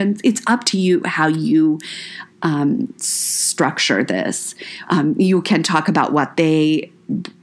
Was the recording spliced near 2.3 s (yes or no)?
no